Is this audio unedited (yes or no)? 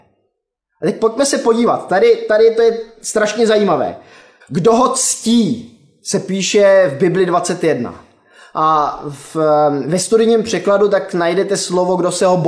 no